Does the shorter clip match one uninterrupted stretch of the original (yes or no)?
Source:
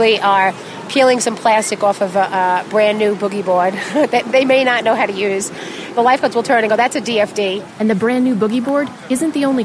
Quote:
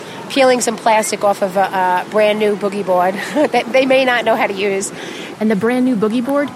no